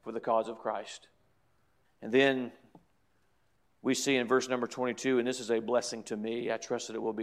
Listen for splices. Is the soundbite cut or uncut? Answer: cut